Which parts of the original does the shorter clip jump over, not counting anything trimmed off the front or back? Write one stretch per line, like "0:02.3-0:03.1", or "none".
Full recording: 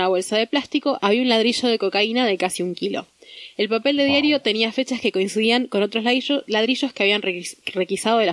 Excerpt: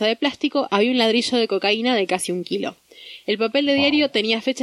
none